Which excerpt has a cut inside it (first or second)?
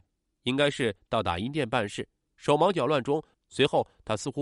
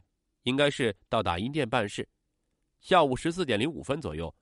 first